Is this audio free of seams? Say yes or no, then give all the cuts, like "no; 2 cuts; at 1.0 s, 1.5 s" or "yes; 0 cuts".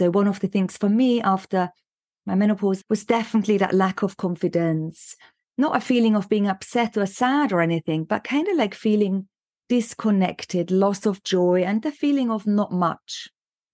no; 1 cut; at 2.8 s